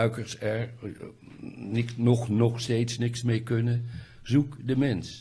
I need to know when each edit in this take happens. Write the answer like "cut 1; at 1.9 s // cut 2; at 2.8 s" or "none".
none